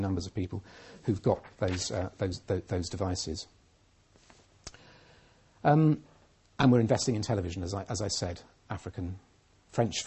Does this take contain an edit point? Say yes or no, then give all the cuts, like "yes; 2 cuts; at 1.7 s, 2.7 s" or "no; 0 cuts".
yes; 1 cut; at 8.6 s